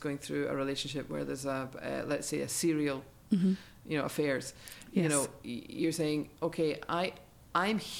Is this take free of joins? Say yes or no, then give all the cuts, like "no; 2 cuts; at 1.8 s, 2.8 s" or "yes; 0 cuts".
yes; 0 cuts